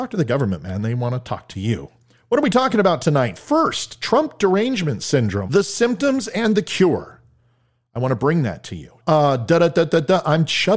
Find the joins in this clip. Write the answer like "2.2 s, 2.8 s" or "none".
5.5 s, 9.0 s